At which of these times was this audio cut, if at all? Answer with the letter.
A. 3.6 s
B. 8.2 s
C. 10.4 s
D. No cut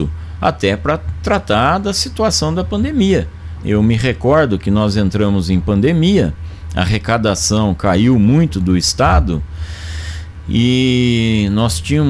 A